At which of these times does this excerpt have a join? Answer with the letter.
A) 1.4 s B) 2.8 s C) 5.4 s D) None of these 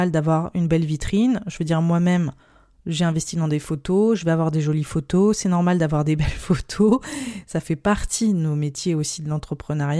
D